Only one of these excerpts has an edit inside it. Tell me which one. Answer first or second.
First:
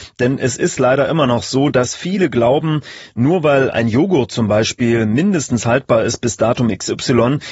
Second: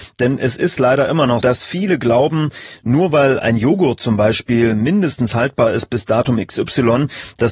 second